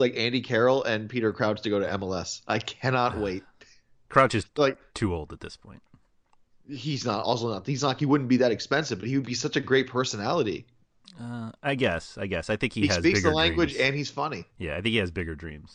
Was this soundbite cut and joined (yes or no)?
no